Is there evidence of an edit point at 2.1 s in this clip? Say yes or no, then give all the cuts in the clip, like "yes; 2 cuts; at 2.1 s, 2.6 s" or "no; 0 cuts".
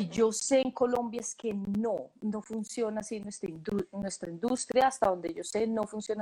no; 0 cuts